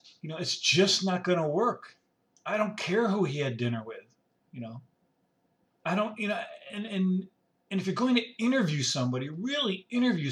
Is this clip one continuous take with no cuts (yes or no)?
no